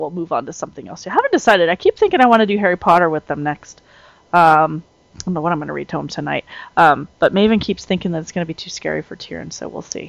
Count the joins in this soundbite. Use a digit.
0